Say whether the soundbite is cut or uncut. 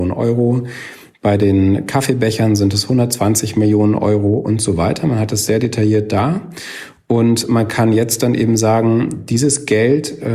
uncut